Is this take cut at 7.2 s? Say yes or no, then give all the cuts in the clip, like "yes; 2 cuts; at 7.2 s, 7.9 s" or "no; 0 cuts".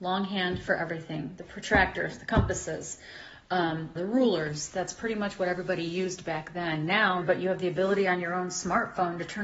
yes; 2 cuts; at 4.0 s, 7.2 s